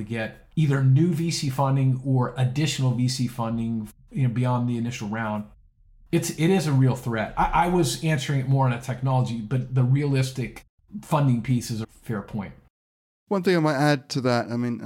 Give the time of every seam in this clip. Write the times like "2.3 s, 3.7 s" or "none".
11.8 s